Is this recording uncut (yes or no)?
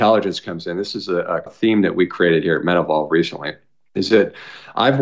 no